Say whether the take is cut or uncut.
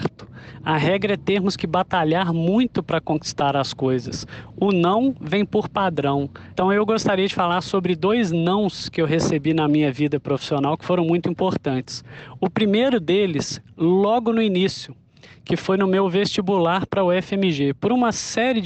cut